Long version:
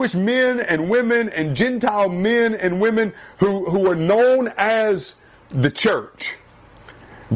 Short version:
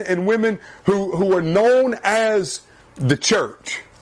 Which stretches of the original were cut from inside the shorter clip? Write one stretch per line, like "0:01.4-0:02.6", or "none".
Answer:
none